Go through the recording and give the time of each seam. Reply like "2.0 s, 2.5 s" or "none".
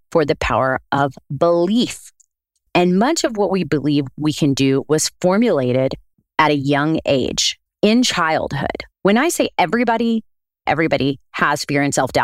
2.6 s, 8.9 s, 10.7 s